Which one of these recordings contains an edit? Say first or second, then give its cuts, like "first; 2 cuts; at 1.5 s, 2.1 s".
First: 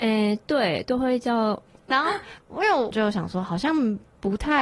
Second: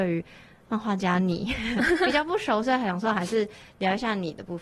first; 2 cuts; at 1.9 s, 2.9 s